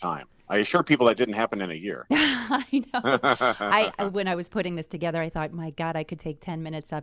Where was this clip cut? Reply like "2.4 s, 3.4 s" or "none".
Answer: none